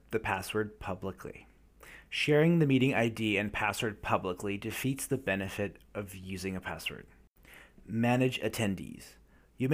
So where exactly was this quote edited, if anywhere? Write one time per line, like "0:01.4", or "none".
none